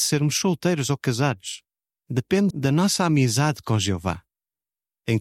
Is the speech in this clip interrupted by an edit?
yes; 1 cut; at 2.5 s

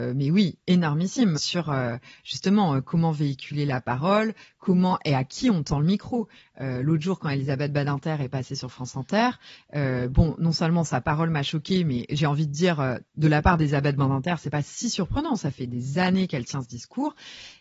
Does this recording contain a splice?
yes; 1 cut; at 1.4 s

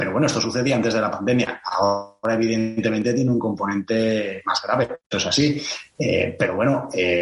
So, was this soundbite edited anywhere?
yes; 1 cut; at 5.0 s

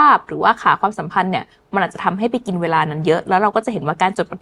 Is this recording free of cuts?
yes; 0 cuts

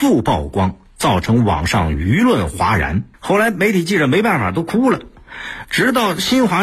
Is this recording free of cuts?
no; 1 cut; at 3.1 s

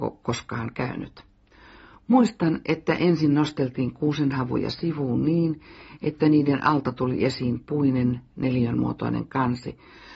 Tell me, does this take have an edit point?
no; 0 cuts

